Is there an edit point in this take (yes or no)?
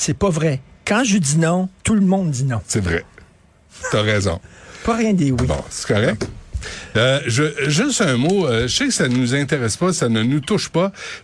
yes